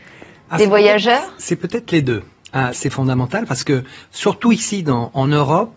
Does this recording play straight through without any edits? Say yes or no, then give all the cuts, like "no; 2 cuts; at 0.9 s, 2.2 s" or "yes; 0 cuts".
no; 1 cut; at 2.7 s